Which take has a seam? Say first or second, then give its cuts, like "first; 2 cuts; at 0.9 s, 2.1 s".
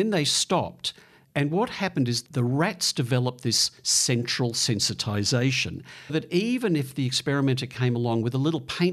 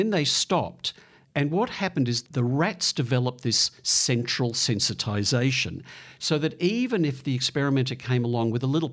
first; 1 cut; at 6.1 s